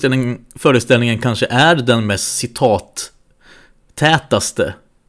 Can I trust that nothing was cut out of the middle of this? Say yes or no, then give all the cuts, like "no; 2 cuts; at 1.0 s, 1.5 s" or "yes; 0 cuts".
yes; 0 cuts